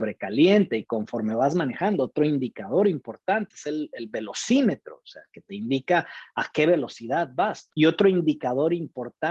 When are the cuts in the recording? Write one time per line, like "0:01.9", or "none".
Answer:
0:07.7